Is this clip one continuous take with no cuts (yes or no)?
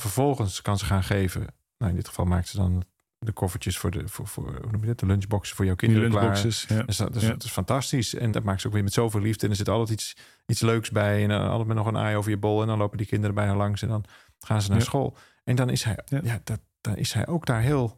no